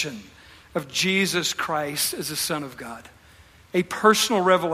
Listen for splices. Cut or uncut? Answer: uncut